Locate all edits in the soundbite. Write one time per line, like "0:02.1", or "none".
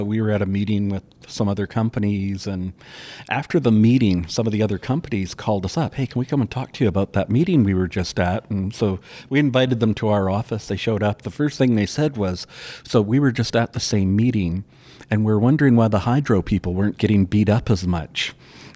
none